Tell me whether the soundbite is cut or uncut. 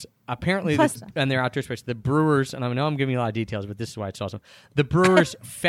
cut